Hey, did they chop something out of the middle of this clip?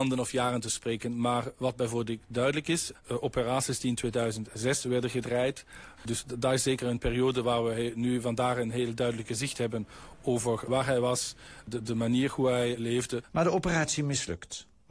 yes; 2 cuts; at 6.0 s, 13.3 s

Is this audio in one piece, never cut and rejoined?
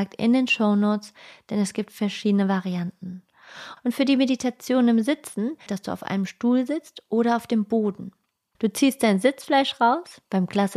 no; 3 cuts; at 3.8 s, 5.7 s, 8.5 s

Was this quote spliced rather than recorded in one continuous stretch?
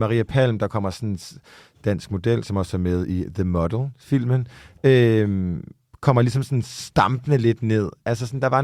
no; 0 cuts

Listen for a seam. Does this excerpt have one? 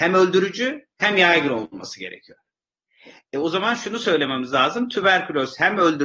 no; 0 cuts

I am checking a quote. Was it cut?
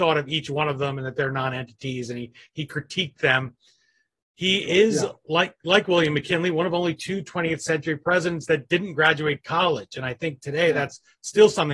no; 0 cuts

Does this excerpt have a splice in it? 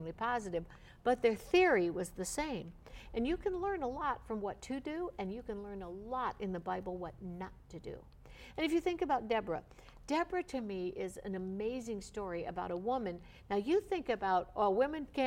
no; 0 cuts

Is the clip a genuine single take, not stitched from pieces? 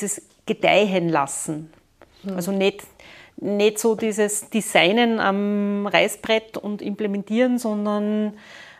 yes; 0 cuts

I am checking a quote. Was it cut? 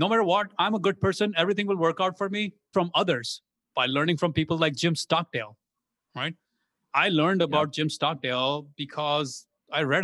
yes; 1 cut; at 2.7 s

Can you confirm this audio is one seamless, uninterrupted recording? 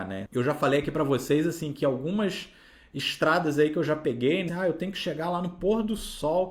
no; 1 cut; at 4.5 s

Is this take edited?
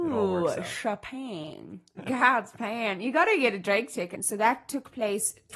yes; 2 cuts; at 2.0 s, 4.1 s

